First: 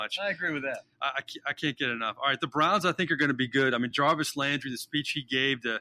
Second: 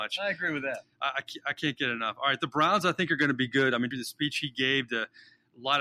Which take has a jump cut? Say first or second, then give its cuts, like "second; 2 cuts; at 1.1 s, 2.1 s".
second; 1 cut; at 3.9 s